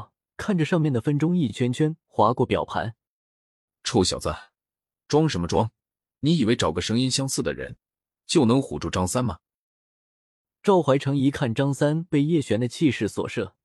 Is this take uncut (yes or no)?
yes